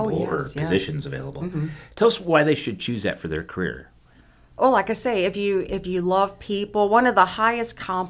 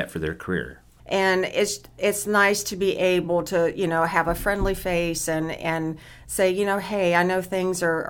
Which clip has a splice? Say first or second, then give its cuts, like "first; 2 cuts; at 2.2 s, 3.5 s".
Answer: second; 1 cut; at 1.0 s